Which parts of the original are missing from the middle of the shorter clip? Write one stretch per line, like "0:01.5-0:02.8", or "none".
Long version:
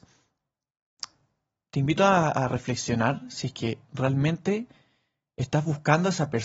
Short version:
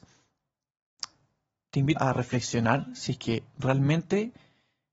0:02.0-0:02.3